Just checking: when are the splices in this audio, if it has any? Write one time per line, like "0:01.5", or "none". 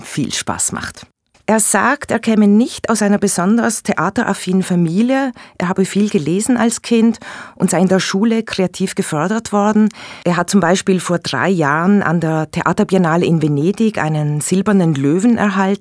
0:01.3
0:10.2